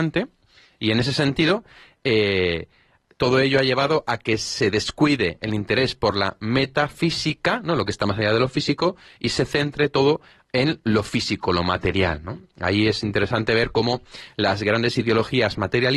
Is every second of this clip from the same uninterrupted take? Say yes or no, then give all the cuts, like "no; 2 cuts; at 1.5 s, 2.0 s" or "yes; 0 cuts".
yes; 0 cuts